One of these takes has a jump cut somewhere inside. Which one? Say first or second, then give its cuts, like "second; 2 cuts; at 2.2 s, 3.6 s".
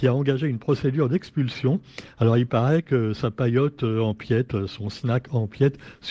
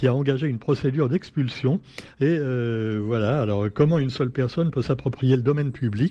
second; 1 cut; at 2.1 s